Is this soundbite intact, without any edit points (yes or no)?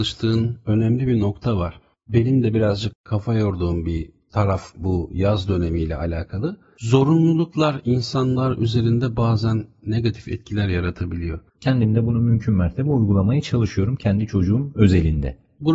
no